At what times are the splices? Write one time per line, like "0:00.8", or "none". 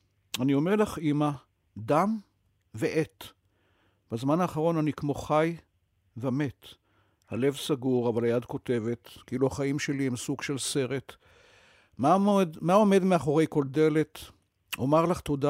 none